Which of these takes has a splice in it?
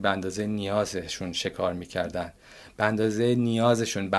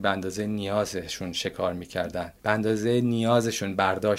second; 1 cut; at 2.4 s

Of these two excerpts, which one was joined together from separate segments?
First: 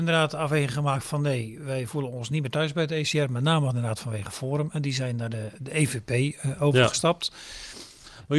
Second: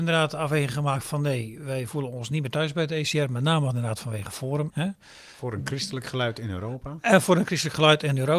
second; 1 cut; at 4.7 s

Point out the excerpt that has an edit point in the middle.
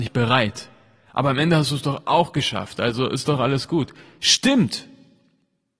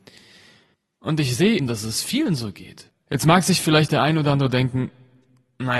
second; 2 cuts; at 1.6 s, 2.9 s

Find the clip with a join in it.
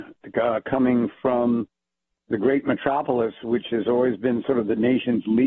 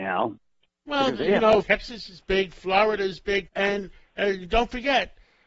second; 2 cuts; at 1.6 s, 3.5 s

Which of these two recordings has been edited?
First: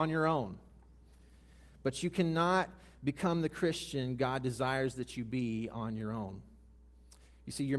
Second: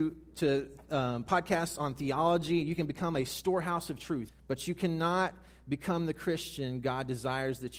second; 1 cut; at 4.3 s

